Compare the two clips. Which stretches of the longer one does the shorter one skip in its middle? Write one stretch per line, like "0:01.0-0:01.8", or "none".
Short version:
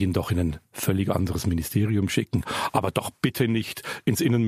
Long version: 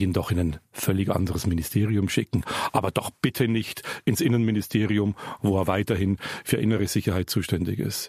none